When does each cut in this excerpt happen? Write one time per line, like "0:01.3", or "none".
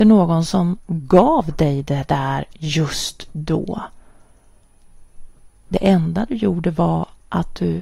none